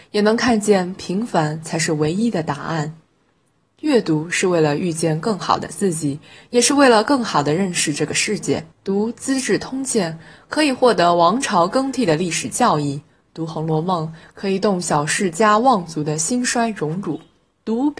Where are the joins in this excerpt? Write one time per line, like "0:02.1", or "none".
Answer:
0:08.7